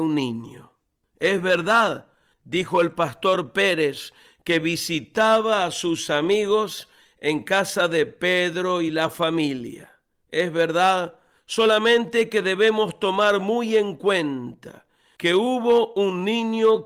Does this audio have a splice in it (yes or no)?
no